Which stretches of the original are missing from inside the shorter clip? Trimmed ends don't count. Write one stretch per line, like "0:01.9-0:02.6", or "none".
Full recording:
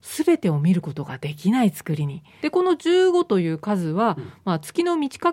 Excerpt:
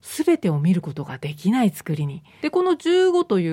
none

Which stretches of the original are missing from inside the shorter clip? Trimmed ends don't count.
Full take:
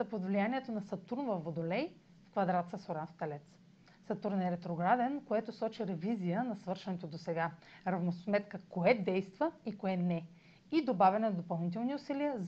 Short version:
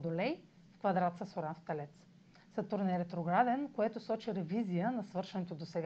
none

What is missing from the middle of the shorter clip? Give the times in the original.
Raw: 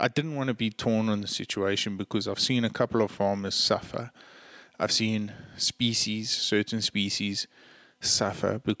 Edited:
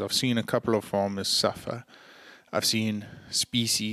none

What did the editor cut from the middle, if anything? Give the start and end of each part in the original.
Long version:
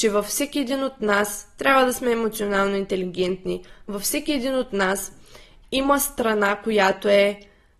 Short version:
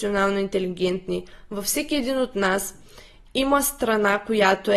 none

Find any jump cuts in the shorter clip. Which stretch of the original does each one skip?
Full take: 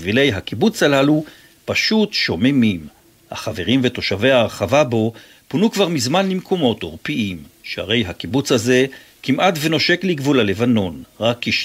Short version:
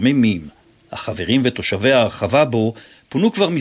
none

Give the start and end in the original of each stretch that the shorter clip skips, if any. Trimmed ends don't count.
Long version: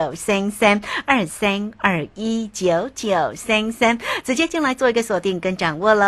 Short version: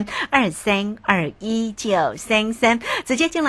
0:02.5-0:02.9

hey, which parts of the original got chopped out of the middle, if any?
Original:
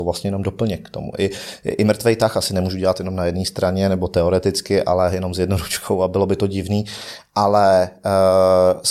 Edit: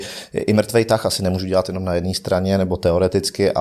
none

